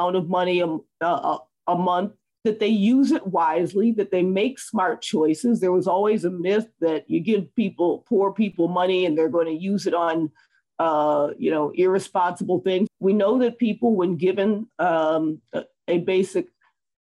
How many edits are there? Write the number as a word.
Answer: one